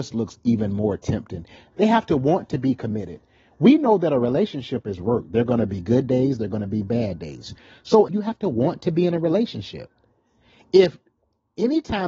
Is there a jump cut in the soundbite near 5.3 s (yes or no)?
no